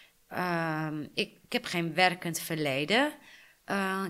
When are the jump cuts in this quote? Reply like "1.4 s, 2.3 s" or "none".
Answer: 1.4 s